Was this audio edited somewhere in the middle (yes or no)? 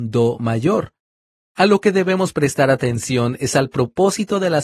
no